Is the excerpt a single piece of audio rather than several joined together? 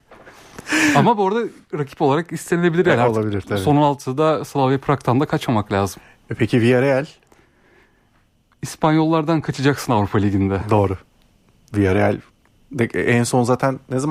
yes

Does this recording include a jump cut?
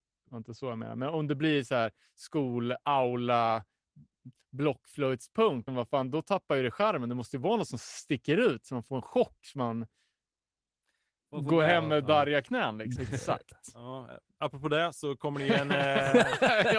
yes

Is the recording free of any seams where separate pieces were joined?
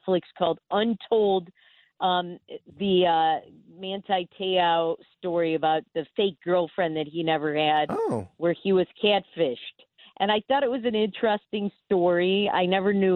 no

